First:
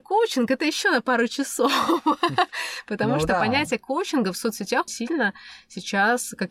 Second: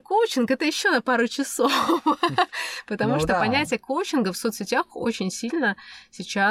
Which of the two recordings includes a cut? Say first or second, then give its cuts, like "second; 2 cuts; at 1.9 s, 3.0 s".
first; 1 cut; at 4.9 s